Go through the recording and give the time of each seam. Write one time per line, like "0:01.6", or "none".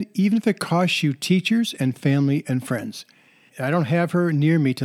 0:03.5